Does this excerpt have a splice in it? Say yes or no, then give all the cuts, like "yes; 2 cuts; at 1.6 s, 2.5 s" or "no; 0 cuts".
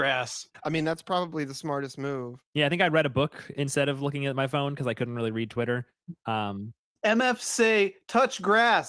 yes; 1 cut; at 7.0 s